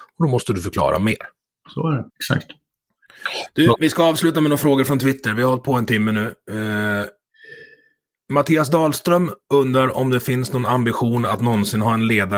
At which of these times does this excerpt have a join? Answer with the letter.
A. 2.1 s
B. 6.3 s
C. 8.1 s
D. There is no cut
A